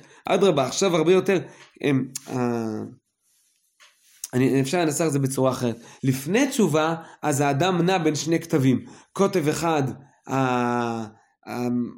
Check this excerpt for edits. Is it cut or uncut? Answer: uncut